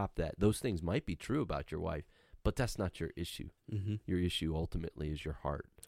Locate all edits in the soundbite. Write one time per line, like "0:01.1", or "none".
none